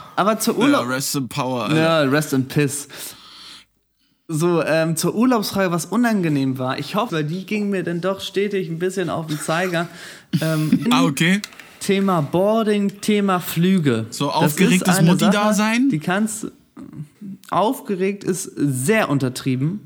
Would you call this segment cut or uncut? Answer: cut